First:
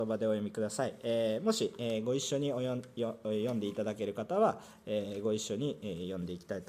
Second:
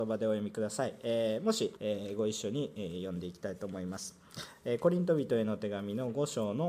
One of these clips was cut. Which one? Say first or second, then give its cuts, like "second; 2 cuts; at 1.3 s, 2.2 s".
second; 1 cut; at 1.8 s